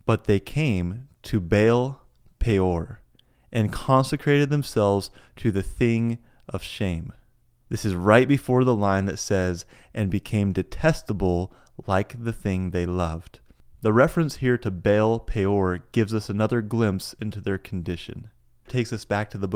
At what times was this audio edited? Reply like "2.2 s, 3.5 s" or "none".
none